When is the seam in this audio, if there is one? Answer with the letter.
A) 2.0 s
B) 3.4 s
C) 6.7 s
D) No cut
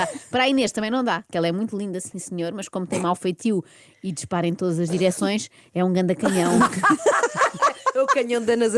D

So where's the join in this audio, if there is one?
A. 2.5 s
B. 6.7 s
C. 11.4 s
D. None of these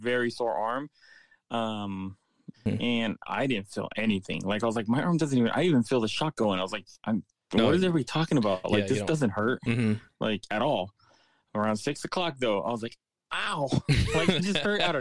A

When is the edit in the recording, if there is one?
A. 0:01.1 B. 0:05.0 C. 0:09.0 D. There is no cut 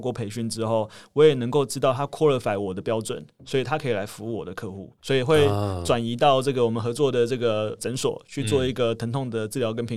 B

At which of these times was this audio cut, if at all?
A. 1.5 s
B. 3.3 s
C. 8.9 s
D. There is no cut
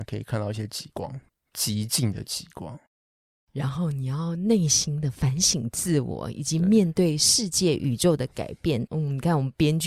C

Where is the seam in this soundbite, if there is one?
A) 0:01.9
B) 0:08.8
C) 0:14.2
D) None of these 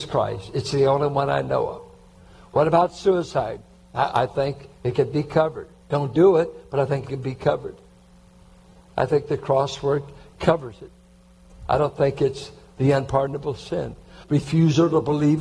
C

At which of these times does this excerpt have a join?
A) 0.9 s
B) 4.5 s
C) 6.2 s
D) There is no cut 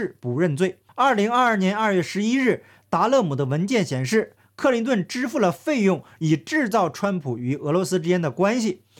C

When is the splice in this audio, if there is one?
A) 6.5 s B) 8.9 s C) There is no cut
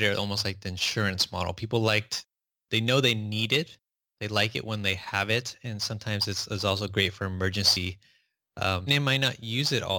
B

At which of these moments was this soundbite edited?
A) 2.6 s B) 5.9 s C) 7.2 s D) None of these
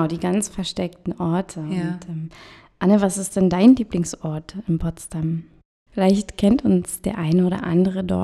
B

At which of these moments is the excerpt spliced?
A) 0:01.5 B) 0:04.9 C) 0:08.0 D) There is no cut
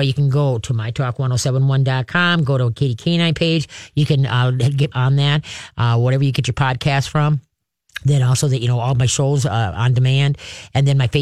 B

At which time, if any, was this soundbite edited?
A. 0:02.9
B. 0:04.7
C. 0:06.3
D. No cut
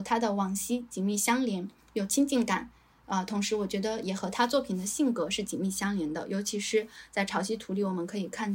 D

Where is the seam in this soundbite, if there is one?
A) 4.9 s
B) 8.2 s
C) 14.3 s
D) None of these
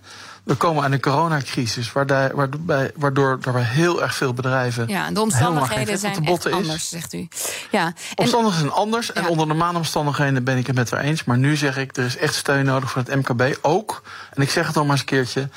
D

